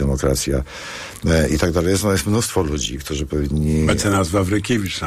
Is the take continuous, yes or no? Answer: yes